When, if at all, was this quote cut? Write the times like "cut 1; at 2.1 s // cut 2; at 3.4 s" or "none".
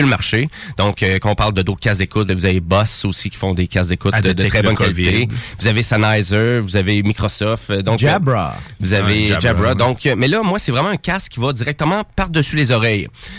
cut 1; at 2.3 s